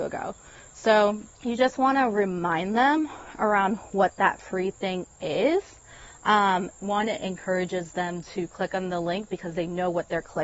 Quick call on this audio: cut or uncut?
cut